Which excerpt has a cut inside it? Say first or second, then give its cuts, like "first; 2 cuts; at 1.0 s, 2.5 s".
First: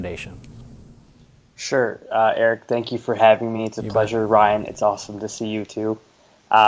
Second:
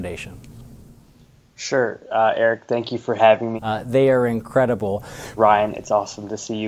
second; 2 cuts; at 3.6 s, 5.4 s